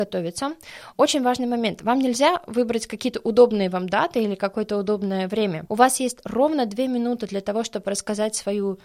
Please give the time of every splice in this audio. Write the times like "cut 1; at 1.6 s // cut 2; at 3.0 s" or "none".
cut 1; at 0.9 s // cut 2; at 5.7 s